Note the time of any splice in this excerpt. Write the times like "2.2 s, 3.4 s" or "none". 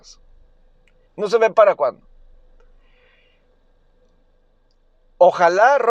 1.1 s